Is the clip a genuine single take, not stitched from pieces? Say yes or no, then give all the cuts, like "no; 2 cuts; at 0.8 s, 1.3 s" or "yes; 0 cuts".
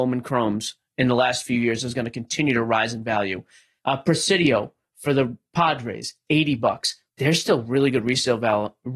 no; 2 cuts; at 3.8 s, 7.1 s